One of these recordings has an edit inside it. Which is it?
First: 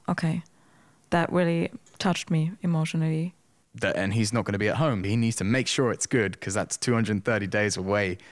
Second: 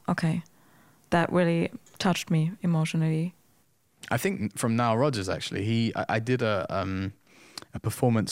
first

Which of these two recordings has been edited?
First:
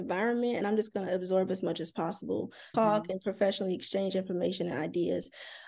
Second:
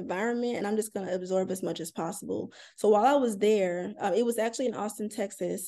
first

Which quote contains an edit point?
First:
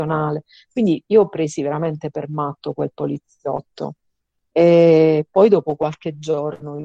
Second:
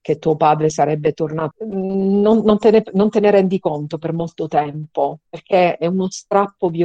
second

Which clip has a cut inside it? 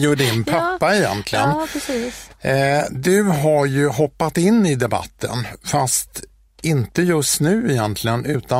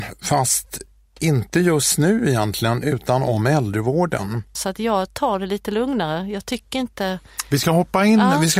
second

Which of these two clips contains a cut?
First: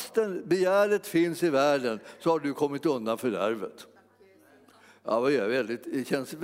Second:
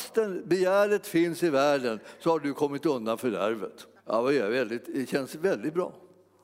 second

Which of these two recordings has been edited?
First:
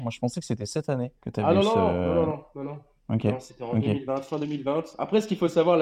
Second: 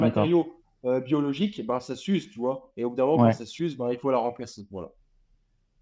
first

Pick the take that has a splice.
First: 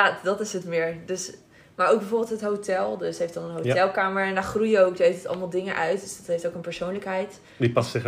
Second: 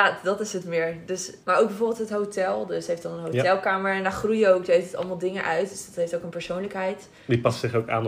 second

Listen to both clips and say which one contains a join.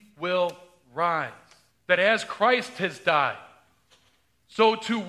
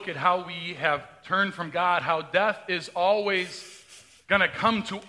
first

